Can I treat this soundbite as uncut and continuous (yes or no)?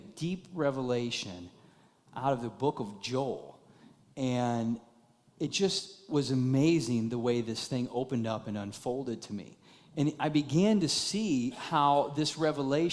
yes